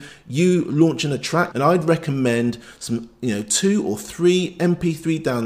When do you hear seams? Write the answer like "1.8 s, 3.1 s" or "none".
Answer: 1.5 s

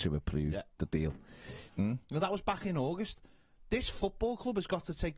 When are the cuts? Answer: 1.7 s

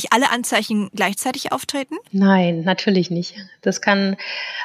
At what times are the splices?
2.1 s

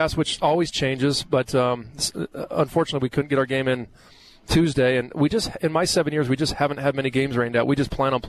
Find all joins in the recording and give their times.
none

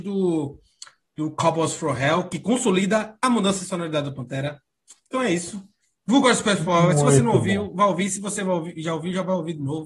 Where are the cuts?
none

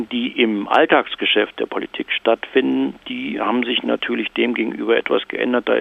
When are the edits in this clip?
none

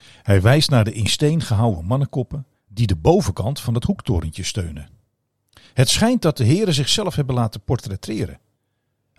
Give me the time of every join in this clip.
none

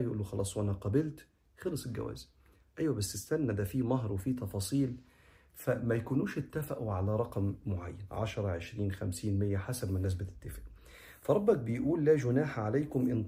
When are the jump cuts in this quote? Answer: none

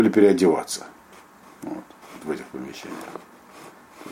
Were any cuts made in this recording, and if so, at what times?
none

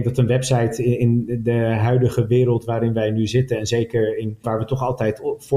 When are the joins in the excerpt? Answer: 4.4 s

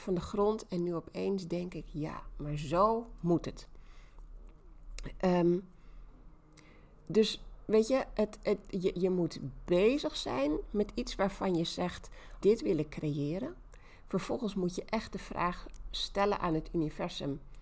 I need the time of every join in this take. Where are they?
8.9 s, 12.4 s

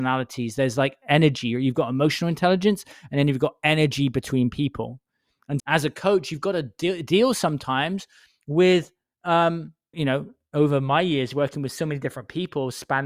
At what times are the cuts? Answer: 5.6 s, 9.9 s

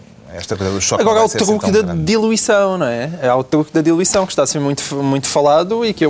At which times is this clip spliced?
none

